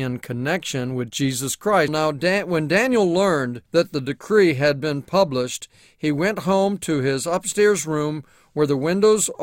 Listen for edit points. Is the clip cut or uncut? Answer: cut